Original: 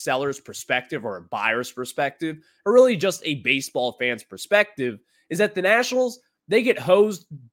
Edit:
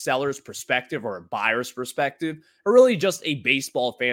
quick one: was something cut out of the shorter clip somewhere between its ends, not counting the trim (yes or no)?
no